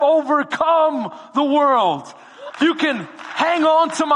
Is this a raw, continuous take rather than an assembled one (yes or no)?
no